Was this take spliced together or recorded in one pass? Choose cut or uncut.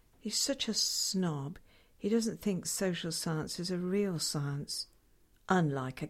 uncut